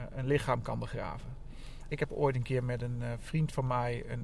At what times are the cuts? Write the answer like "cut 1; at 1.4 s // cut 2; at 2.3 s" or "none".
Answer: cut 1; at 1.9 s